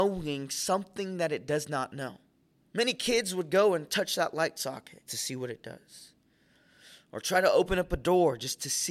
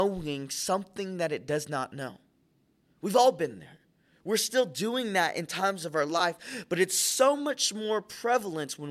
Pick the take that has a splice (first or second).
first